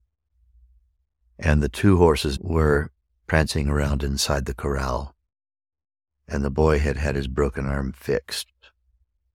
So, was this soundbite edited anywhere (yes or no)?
yes